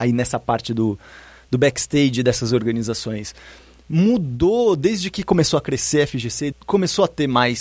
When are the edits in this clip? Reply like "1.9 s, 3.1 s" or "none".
6.5 s